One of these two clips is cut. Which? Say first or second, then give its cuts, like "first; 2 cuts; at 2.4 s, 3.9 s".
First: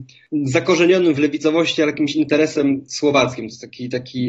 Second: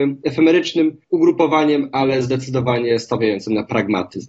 second; 1 cut; at 1.0 s